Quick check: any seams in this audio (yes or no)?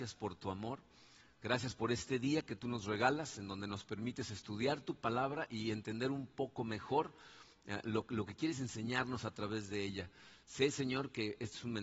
no